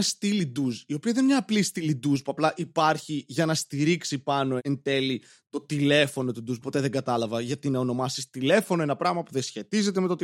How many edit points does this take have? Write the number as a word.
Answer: two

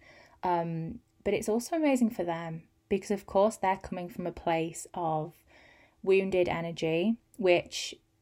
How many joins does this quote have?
zero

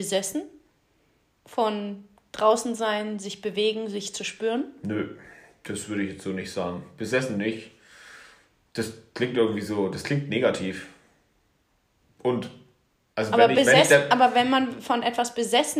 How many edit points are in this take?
zero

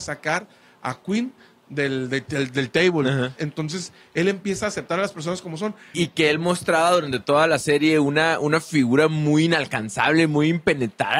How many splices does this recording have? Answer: two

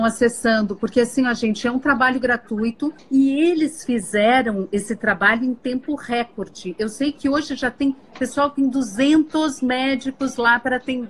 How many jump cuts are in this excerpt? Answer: zero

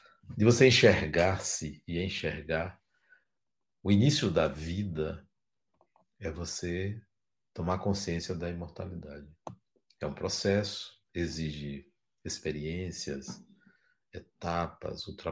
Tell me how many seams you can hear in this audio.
one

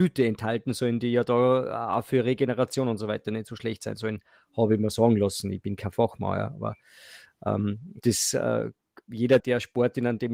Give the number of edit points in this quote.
two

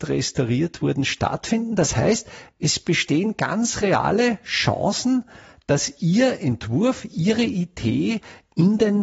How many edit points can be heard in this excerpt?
zero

